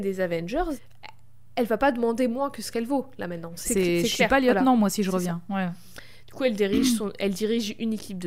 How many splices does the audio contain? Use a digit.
1